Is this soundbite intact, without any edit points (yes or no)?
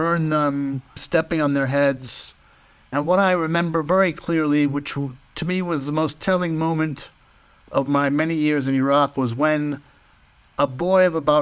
no